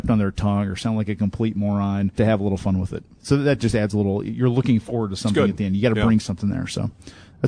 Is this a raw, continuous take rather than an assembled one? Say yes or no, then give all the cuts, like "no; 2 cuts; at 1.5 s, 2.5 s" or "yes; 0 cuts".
no; 1 cut; at 2.2 s